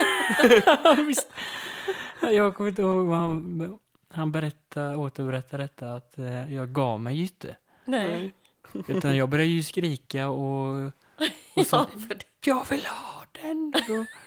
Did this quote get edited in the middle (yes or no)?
no